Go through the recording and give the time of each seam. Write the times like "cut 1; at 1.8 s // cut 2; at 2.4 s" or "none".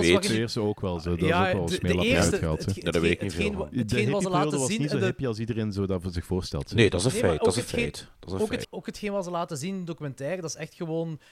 cut 1; at 8.6 s